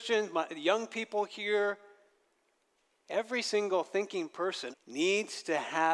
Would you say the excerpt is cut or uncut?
cut